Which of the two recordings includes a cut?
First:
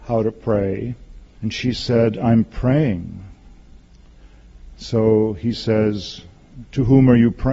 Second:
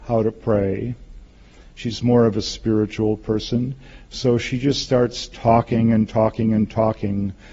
first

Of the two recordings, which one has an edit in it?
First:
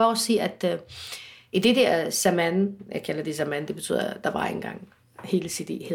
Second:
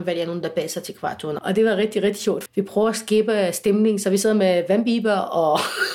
second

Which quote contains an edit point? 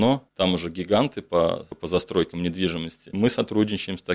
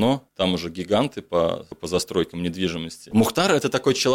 second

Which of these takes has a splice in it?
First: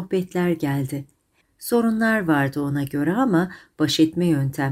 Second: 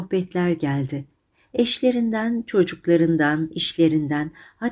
first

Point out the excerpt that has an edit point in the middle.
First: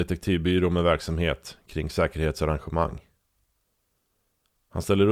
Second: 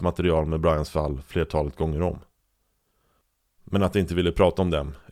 second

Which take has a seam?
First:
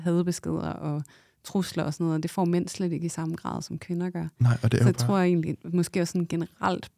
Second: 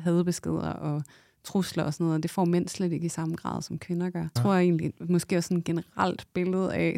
second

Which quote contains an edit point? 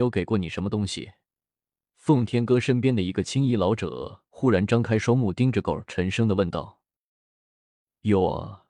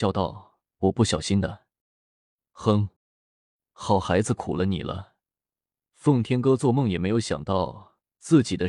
second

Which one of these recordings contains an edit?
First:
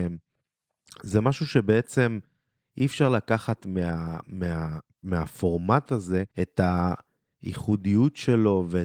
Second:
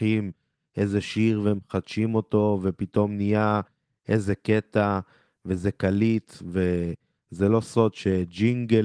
first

